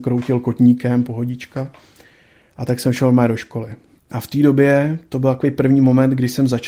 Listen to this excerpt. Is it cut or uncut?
cut